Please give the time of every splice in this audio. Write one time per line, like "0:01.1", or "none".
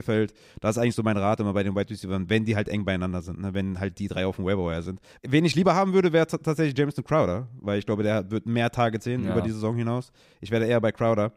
0:05.2